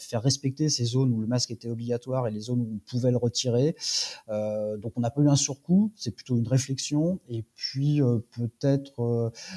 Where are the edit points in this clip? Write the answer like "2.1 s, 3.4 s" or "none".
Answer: none